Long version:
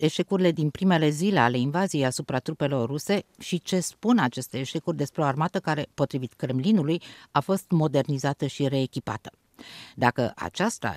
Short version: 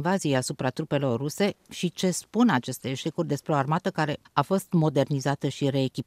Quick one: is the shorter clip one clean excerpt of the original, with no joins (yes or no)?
no